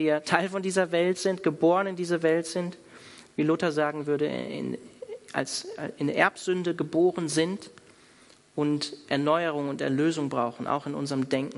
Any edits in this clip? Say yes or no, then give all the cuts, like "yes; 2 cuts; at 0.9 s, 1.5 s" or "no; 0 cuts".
no; 0 cuts